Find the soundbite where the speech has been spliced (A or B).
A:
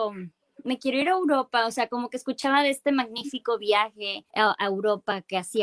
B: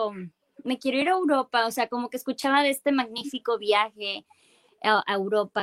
A